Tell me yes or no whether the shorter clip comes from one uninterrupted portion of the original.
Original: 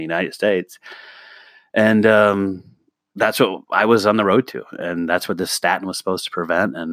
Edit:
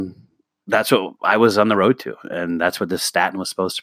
yes